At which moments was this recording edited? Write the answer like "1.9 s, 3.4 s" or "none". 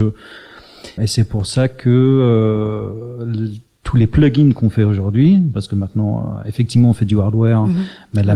1.0 s